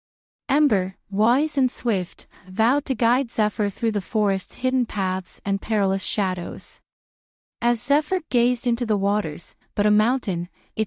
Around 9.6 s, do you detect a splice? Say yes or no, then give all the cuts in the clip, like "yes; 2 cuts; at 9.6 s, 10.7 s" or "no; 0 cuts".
yes; 2 cuts; at 7.5 s, 9.6 s